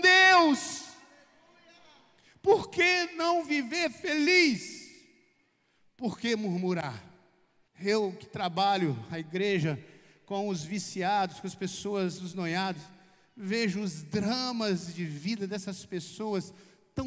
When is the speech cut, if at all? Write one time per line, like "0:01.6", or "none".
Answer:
0:07.7